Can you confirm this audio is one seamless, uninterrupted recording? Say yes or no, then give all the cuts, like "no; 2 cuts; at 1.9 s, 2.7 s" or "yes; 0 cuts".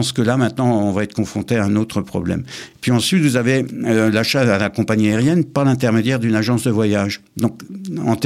yes; 0 cuts